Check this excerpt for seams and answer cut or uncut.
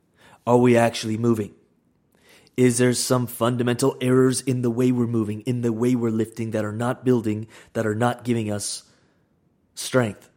uncut